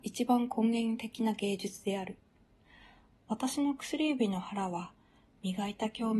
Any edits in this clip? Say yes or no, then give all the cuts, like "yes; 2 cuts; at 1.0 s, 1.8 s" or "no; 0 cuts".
no; 0 cuts